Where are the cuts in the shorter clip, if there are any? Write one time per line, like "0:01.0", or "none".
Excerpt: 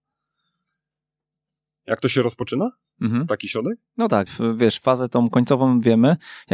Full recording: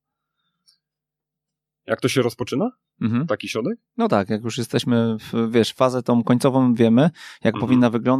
0:04.3